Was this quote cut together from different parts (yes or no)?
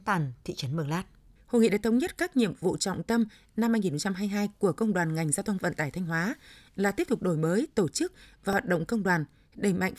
yes